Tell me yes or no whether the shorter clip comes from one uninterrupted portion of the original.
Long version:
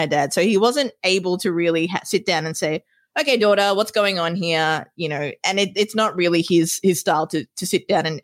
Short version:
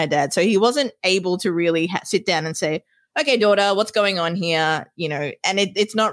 yes